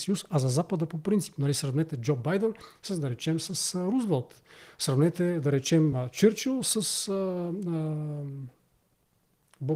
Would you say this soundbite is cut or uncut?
uncut